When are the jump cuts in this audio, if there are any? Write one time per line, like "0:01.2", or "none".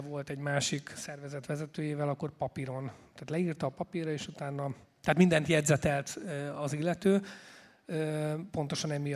none